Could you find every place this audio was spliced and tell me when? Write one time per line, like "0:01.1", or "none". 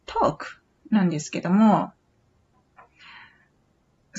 none